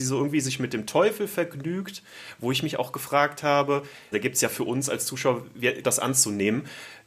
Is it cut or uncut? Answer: cut